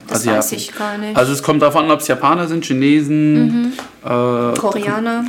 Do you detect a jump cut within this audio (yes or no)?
no